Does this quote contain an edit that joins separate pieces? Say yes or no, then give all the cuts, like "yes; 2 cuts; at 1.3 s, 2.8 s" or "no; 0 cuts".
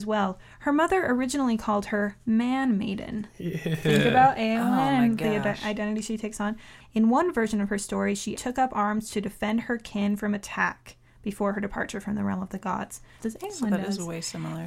yes; 3 cuts; at 6.8 s, 8.4 s, 13.2 s